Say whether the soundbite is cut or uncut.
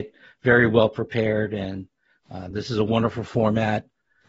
uncut